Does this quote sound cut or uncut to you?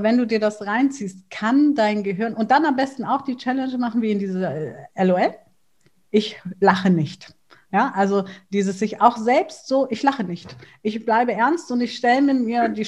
uncut